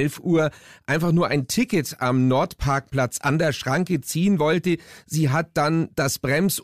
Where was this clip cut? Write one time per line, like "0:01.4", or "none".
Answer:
none